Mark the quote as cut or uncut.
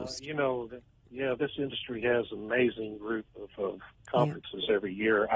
uncut